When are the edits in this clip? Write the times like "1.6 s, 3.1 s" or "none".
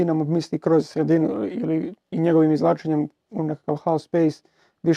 none